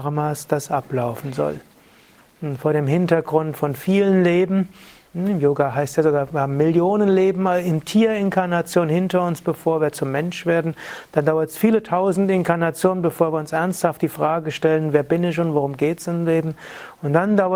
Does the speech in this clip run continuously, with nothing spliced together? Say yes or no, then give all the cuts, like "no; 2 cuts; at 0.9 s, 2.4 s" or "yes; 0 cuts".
yes; 0 cuts